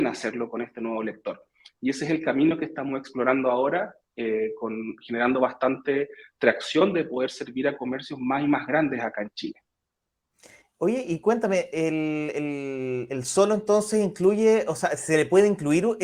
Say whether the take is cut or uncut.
uncut